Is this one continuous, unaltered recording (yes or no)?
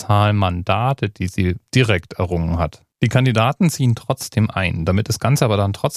no